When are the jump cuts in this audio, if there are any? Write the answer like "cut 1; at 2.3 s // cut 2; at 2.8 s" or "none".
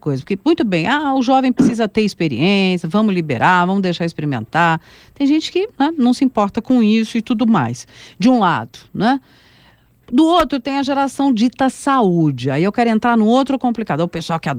none